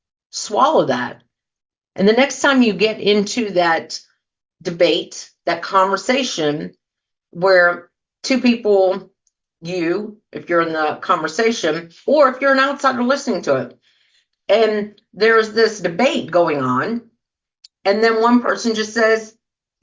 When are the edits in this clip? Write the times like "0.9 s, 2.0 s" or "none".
none